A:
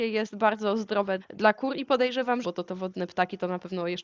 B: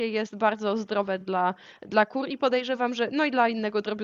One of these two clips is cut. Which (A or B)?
A